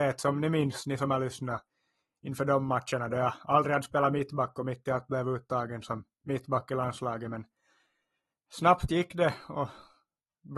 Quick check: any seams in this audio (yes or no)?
no